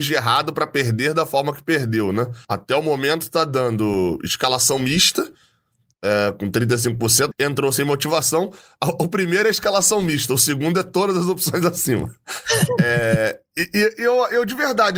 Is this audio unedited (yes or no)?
no